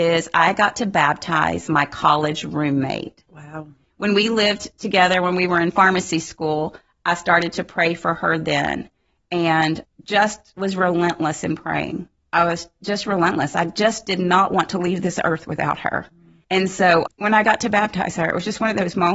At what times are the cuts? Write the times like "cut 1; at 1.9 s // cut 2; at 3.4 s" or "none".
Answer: cut 1; at 3.3 s